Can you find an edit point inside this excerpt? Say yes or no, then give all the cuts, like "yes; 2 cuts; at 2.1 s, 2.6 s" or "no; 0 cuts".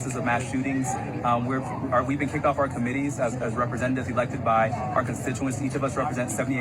no; 0 cuts